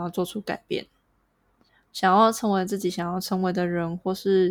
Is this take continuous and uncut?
yes; 0 cuts

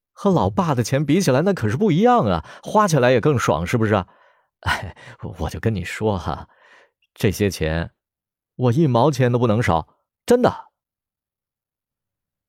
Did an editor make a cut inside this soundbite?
yes; 1 cut; at 10.1 s

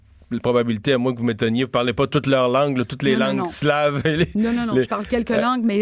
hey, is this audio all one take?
yes; 0 cuts

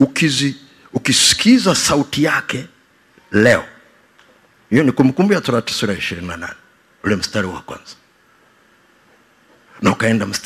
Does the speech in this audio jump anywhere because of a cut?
no; 0 cuts

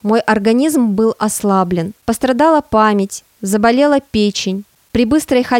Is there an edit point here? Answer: no; 0 cuts

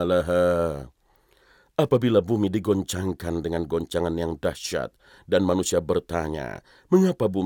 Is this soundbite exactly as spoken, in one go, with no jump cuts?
no; 1 cut; at 5.2 s

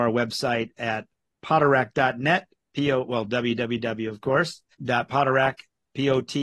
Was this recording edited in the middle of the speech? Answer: yes; 1 cut; at 4.7 s

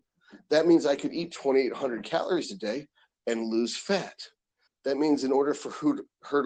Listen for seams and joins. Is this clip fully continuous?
no; 1 cut; at 4.7 s

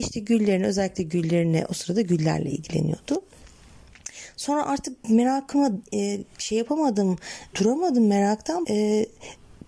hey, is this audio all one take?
no; 2 cuts; at 7.5 s, 8.6 s

